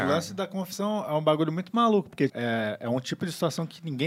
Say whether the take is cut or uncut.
cut